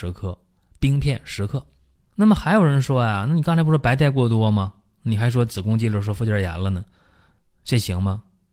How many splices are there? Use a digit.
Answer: 1